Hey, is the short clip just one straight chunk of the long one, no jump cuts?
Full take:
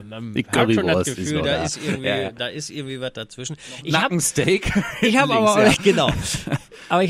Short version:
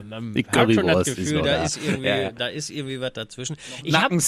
yes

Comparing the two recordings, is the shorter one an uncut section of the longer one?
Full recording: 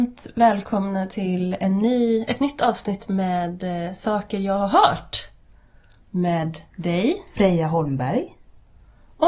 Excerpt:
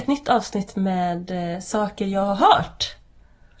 yes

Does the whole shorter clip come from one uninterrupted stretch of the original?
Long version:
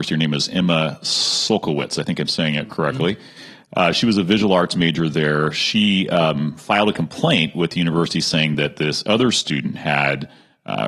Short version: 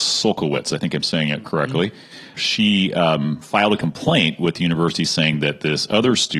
no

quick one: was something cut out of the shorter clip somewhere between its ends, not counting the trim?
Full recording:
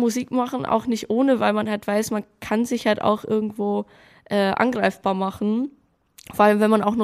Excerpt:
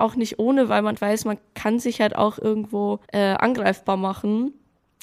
yes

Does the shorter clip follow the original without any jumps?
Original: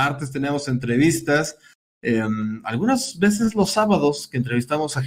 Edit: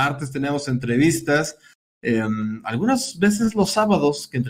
yes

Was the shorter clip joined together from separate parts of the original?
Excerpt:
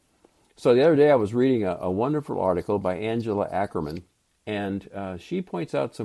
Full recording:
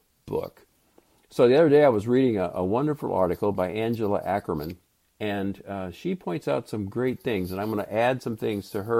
no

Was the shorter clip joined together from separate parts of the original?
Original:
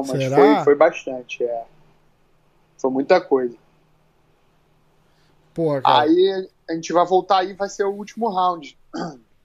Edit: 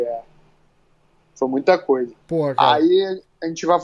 yes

